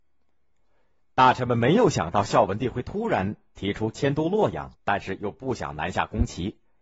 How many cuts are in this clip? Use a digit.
1